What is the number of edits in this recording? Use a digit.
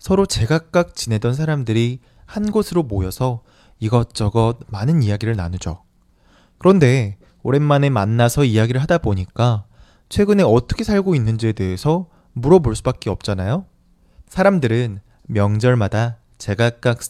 1